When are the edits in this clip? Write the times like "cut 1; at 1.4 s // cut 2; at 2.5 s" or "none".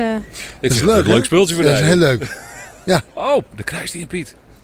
cut 1; at 3.1 s